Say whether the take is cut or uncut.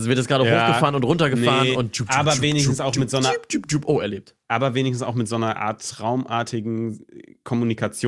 uncut